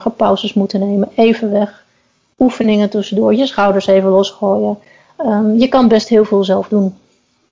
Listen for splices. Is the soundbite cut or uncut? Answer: uncut